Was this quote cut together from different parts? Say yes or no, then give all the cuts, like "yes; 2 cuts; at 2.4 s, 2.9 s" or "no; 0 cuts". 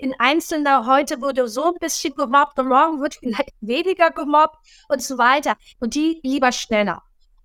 yes; 1 cut; at 5.8 s